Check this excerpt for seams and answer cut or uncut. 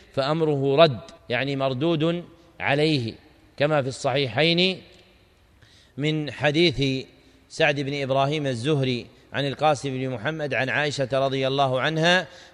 cut